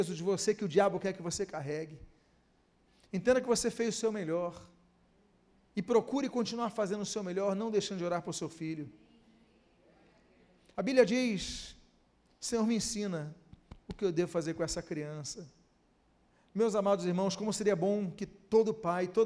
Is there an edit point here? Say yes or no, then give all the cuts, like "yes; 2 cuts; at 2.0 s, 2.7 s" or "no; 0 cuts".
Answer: no; 0 cuts